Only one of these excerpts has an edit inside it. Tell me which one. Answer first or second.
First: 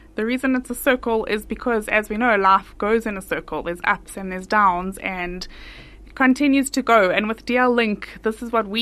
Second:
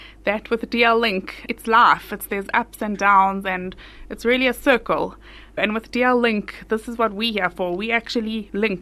second